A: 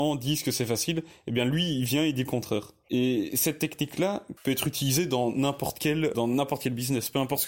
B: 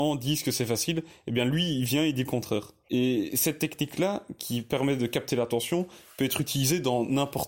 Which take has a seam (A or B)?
A